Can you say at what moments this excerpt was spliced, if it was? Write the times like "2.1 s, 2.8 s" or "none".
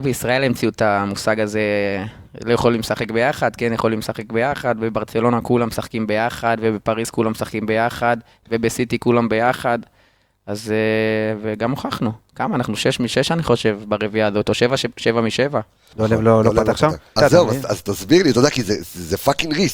15.9 s, 17.2 s